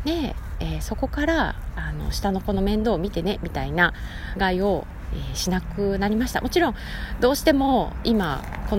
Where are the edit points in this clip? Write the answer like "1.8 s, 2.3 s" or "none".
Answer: 4.4 s